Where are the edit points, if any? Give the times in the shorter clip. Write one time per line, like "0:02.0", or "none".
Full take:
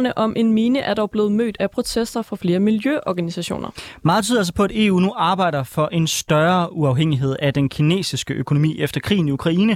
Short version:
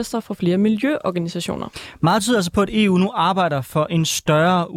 none